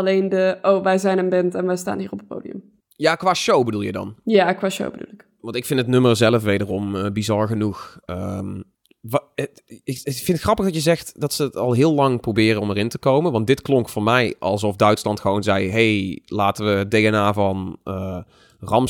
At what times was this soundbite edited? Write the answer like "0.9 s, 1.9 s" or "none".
none